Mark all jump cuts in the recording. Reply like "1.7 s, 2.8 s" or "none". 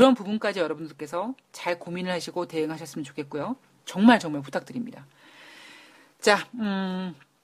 3.8 s